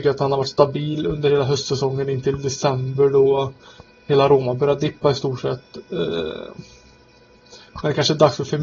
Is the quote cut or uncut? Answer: uncut